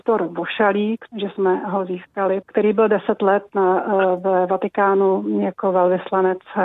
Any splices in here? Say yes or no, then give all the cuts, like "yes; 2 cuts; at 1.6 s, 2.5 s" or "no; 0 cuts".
yes; 2 cuts; at 1.1 s, 2.4 s